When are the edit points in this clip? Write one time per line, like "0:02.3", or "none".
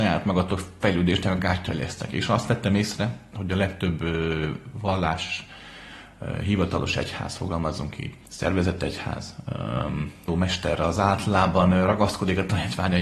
0:08.2
0:10.3